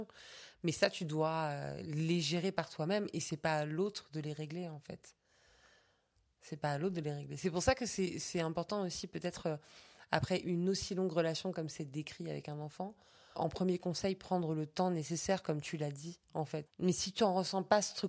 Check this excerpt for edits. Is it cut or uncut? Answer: cut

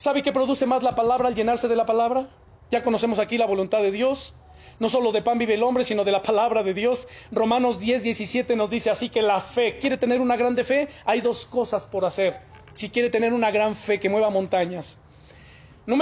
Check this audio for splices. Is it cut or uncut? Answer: uncut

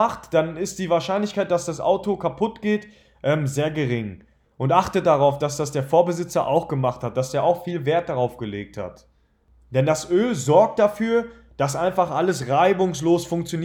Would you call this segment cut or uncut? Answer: uncut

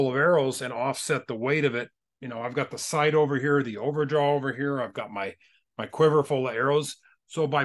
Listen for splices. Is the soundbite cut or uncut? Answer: uncut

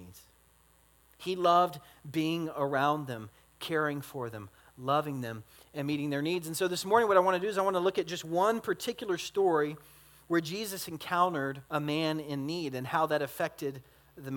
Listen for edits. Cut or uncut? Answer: cut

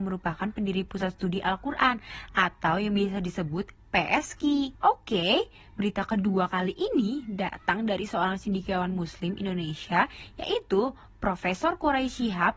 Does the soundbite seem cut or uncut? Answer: cut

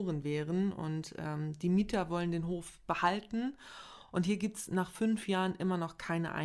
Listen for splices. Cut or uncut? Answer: uncut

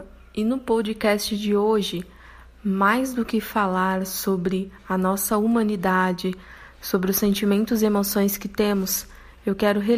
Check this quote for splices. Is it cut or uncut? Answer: uncut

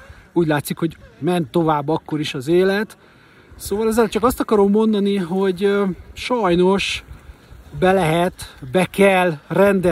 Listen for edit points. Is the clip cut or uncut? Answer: uncut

